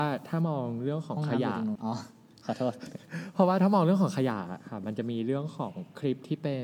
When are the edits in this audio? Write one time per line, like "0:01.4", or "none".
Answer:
0:01.8